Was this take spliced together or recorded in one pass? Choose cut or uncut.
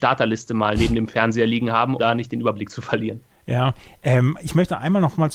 cut